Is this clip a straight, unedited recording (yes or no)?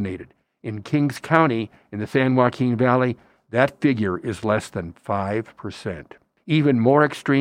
no